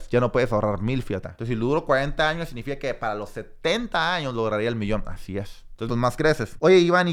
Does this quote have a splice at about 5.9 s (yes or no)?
yes